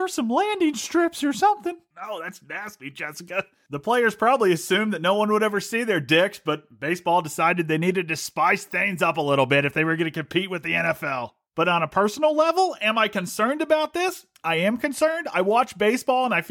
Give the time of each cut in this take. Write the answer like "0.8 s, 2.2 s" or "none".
none